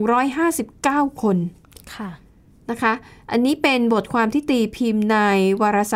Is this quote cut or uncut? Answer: uncut